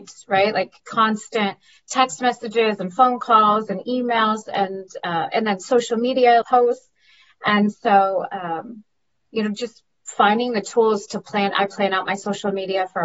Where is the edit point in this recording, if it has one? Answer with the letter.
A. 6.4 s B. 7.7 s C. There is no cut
A